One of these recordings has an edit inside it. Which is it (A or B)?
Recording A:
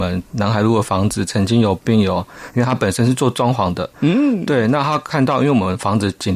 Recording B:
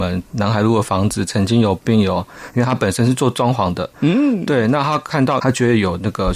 B